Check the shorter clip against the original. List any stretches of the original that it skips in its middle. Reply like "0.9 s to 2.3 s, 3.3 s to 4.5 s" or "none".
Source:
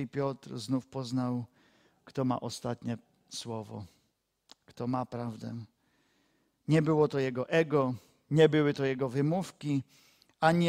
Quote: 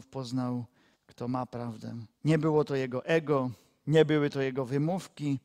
1.7 s to 4.5 s, 5.8 s to 6.6 s